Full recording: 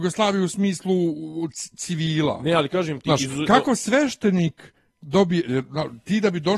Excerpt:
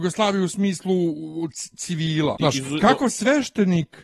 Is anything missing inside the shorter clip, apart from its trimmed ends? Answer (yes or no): yes